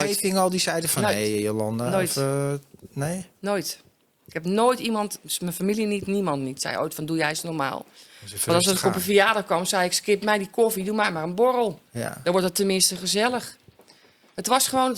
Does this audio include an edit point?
no; 0 cuts

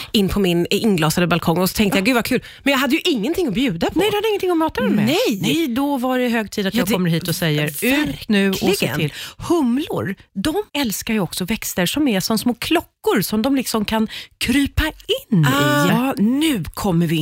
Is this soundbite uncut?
no; 2 cuts; at 10.7 s, 15.9 s

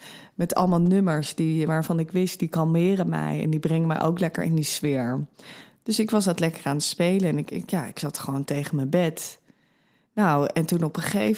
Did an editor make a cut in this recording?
no; 0 cuts

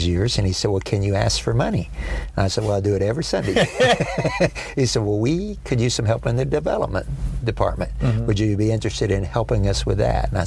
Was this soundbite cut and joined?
no; 0 cuts

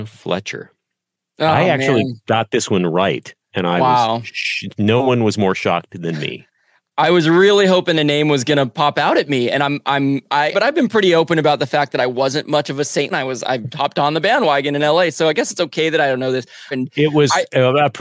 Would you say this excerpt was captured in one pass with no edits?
no; 3 cuts; at 10.5 s, 13.1 s, 16.7 s

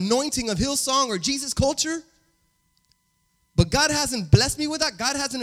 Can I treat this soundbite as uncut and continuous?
yes; 0 cuts

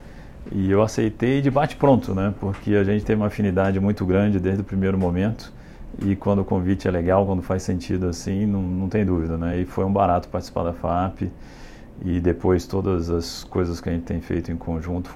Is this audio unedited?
yes; 0 cuts

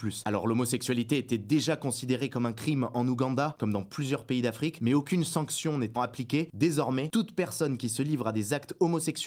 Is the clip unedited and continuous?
no; 1 cut; at 6.0 s

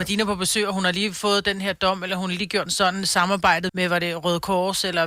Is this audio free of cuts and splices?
no; 2 cuts; at 2.7 s, 3.7 s

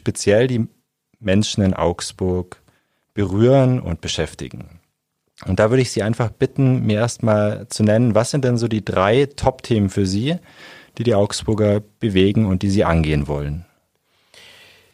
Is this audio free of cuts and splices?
yes; 0 cuts

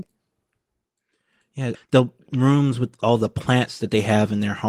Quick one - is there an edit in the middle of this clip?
yes; 1 cut; at 1.7 s

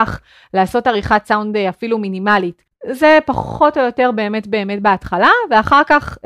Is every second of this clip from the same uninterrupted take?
no; 1 cut; at 2.7 s

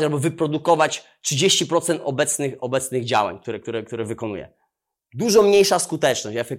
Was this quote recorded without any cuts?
yes; 0 cuts

